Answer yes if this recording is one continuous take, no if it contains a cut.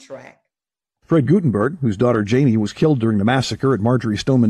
no